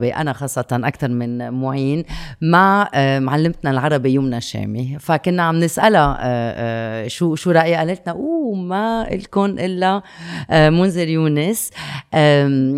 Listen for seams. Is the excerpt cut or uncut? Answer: uncut